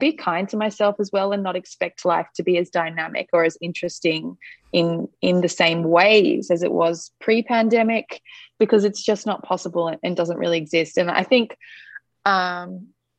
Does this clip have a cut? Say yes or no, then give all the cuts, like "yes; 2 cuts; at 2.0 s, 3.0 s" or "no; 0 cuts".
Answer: no; 0 cuts